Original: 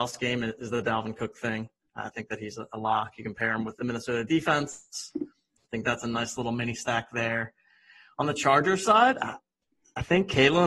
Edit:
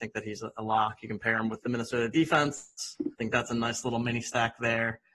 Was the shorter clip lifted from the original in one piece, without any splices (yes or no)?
no